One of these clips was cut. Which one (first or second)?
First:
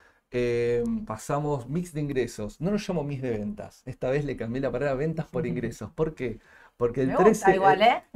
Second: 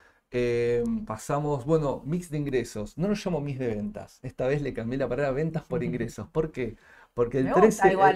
first